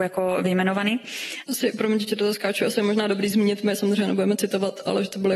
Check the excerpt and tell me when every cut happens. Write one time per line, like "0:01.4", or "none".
none